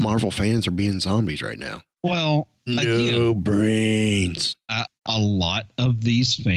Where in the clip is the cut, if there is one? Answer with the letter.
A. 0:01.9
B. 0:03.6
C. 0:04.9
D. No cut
C